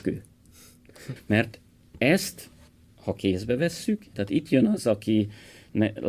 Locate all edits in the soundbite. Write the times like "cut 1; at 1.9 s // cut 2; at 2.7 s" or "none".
cut 1; at 1.2 s // cut 2; at 4.1 s